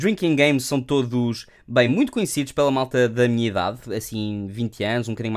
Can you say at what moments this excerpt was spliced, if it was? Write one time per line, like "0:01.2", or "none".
none